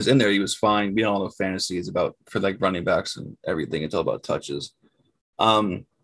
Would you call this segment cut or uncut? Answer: uncut